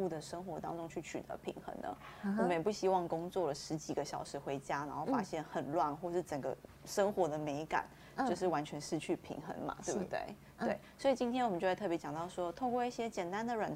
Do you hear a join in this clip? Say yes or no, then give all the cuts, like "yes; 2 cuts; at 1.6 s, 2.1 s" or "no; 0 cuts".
no; 0 cuts